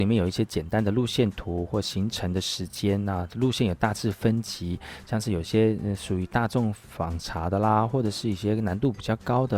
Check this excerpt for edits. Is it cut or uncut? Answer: uncut